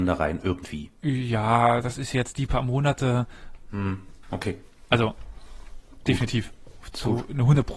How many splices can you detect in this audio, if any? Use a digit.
2